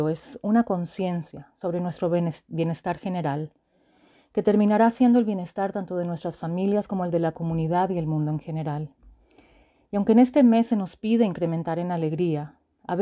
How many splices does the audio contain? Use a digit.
0